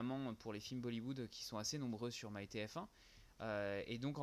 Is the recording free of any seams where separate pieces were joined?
yes; 0 cuts

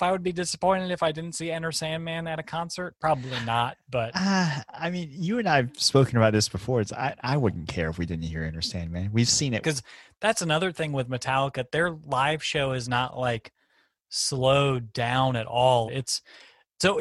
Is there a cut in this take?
yes; 2 cuts; at 9.6 s, 15.9 s

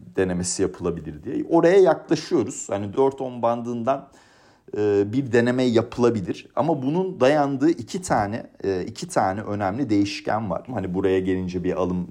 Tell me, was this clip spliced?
yes; 2 cuts; at 2.9 s, 10.7 s

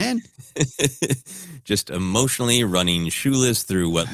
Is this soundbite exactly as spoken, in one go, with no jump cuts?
yes; 0 cuts

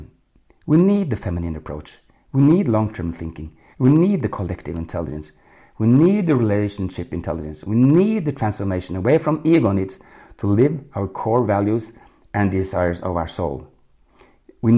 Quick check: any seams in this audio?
yes; 1 cut; at 3.7 s

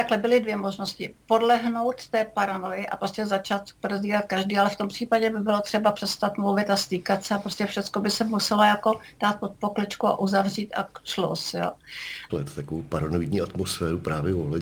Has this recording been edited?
yes; 1 cut; at 12.3 s

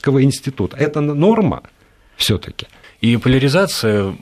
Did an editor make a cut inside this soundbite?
yes; 1 cut; at 2.8 s

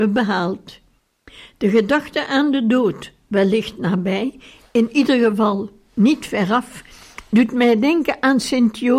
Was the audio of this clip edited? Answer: no; 0 cuts

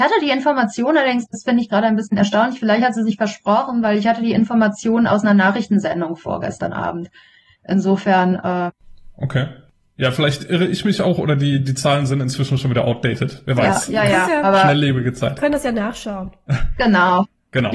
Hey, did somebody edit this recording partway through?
no; 0 cuts

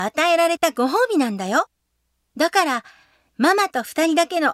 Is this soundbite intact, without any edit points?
yes; 0 cuts

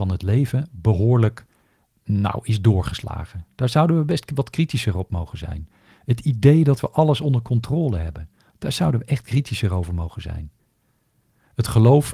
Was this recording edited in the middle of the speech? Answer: yes; 1 cut; at 8.5 s

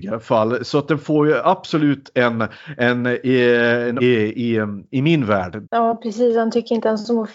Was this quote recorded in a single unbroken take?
no; 2 cuts; at 4.0 s, 5.6 s

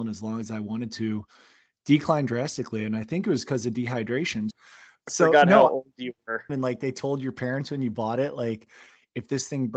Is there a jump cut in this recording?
yes; 2 cuts; at 4.5 s, 6.5 s

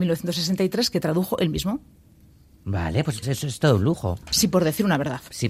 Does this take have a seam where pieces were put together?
yes; 2 cuts; at 3.2 s, 4.2 s

